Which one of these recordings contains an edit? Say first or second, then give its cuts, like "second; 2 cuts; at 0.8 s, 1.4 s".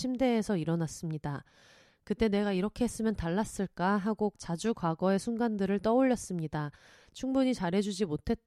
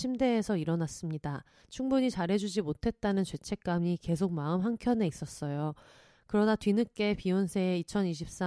second; 1 cut; at 1.6 s